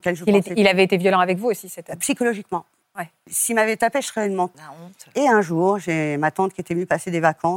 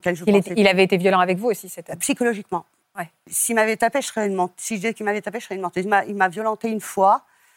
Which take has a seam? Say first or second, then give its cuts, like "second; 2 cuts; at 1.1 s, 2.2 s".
first; 1 cut; at 4.5 s